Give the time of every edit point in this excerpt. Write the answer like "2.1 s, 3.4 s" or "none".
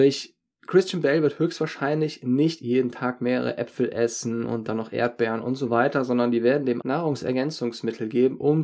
6.8 s